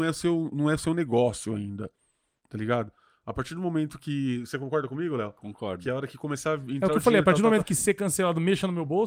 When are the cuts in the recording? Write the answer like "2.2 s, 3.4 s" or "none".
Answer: none

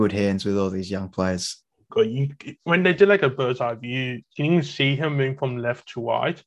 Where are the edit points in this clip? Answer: 1.9 s, 4.2 s

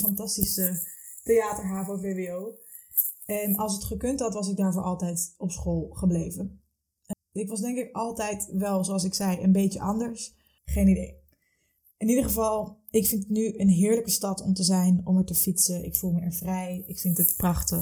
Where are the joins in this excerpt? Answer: 7.1 s, 10.6 s

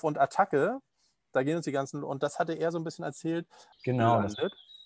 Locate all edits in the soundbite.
3.7 s

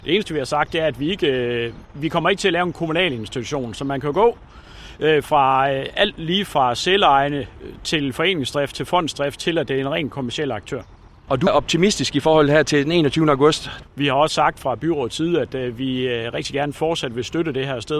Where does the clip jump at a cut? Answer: 11.5 s, 13.8 s

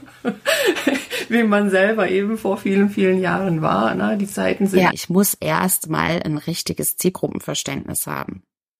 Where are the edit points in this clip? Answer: 4.9 s

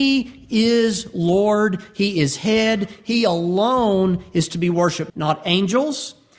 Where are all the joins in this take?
5.1 s

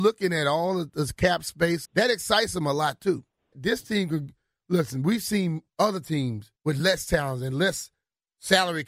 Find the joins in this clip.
1.9 s, 3.5 s, 6.6 s

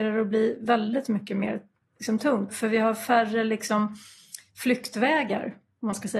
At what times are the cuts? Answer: 2.5 s

